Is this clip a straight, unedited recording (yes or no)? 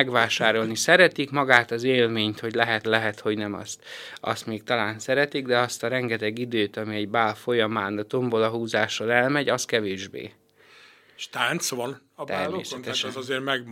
no